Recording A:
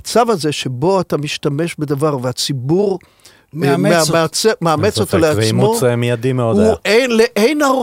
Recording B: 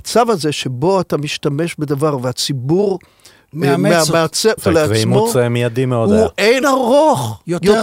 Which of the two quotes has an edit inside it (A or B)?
B